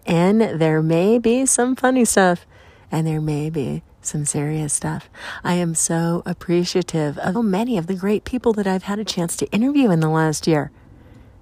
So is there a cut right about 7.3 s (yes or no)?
yes